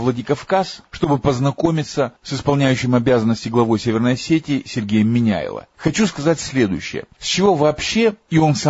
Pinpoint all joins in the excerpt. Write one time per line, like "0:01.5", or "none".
0:05.7